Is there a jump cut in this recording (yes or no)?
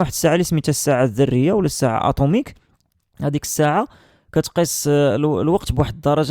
no